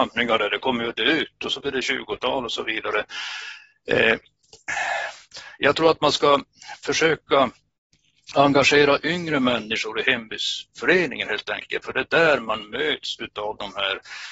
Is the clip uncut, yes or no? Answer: yes